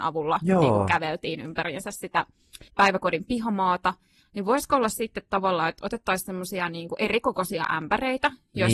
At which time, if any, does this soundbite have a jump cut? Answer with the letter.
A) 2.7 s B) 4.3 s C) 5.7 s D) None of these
A